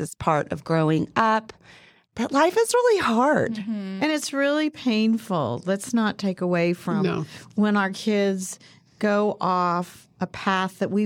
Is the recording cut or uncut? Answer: uncut